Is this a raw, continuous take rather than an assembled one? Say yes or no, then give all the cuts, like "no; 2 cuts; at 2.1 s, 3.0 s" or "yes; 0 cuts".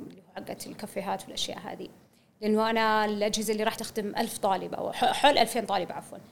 no; 1 cut; at 3.8 s